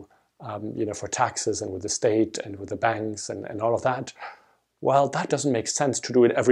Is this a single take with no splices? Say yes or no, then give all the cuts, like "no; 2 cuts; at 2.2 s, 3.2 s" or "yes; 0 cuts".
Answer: no; 1 cut; at 5.3 s